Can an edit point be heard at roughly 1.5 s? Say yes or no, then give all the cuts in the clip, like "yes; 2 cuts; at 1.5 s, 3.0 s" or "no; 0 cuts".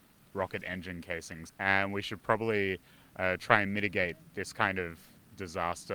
yes; 1 cut; at 1.5 s